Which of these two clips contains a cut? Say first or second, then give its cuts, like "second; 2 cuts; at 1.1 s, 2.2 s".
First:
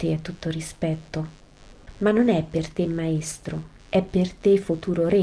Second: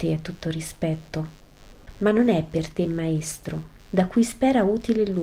second; 1 cut; at 3.9 s